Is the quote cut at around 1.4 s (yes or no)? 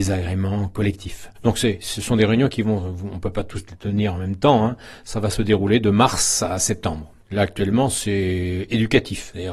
yes